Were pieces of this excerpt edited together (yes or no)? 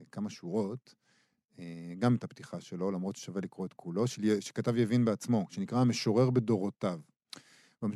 no